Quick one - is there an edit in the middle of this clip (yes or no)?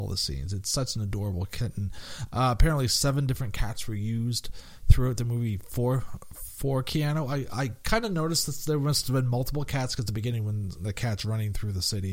no